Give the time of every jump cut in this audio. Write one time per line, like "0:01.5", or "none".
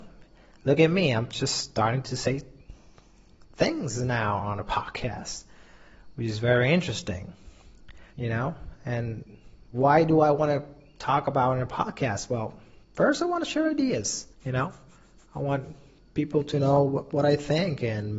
0:08.1
0:14.3